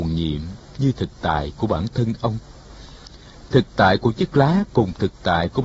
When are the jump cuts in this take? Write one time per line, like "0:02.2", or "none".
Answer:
none